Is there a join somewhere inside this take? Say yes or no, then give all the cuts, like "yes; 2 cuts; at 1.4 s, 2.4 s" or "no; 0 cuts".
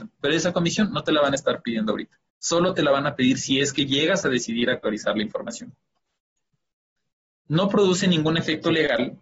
no; 0 cuts